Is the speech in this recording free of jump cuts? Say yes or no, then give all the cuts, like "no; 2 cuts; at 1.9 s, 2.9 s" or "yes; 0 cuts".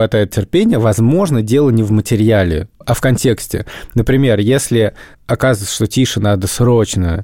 yes; 0 cuts